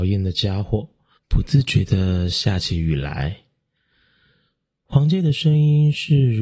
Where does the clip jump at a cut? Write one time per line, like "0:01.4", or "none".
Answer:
0:01.2